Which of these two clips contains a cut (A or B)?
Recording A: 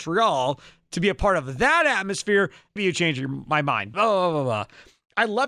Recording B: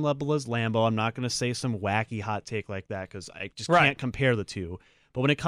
A